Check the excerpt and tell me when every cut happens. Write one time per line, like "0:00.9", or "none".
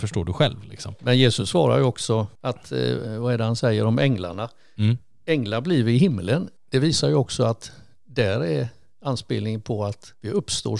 none